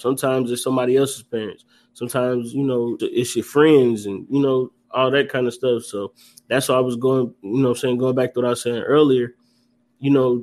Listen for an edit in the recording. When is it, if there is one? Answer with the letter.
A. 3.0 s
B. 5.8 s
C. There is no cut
A